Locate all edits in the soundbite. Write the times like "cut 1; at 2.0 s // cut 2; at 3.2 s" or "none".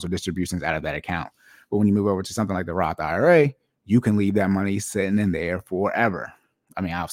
none